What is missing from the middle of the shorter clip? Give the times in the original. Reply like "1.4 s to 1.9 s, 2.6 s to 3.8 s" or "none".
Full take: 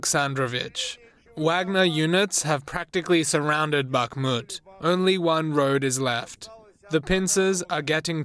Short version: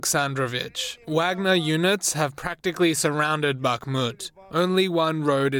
1.0 s to 1.3 s